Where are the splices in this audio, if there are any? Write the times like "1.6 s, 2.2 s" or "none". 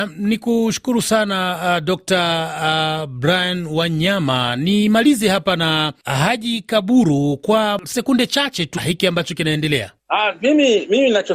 8.8 s